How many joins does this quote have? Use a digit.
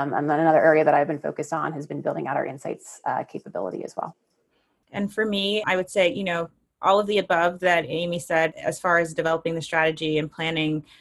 1